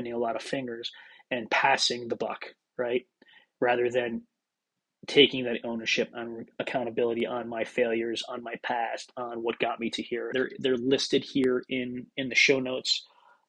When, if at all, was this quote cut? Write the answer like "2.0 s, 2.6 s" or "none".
10.3 s